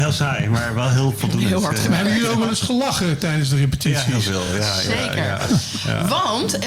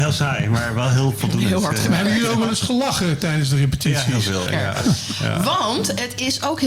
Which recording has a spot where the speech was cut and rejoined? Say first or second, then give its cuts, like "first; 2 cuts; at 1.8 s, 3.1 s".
second; 1 cut; at 4.5 s